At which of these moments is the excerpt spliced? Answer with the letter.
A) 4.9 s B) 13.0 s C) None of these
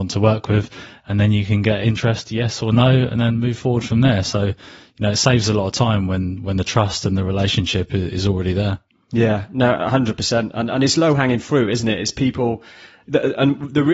C